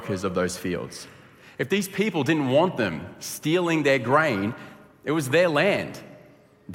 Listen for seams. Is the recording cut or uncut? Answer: uncut